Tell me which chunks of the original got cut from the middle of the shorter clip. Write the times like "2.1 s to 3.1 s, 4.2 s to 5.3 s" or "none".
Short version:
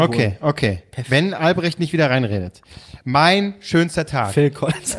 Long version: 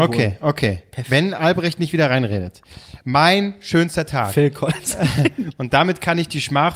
none